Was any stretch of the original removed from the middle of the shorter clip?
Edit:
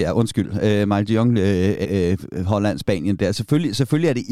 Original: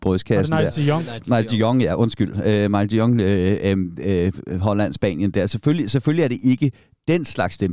yes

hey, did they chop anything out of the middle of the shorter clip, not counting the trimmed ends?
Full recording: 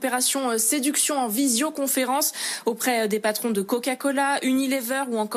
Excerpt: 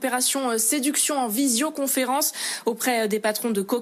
no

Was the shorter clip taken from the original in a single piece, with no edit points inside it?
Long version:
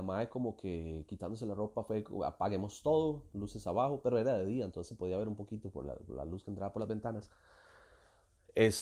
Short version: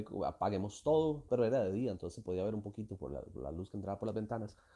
no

